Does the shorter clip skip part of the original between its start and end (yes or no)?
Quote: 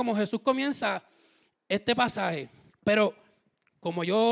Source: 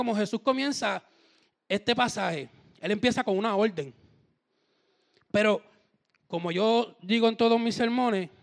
yes